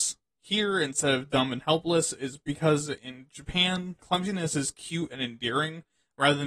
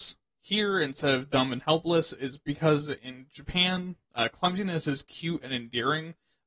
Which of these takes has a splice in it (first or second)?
first